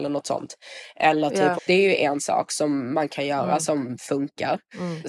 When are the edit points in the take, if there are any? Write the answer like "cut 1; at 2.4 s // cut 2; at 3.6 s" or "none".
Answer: cut 1; at 1.6 s